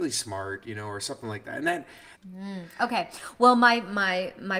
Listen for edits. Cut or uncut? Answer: cut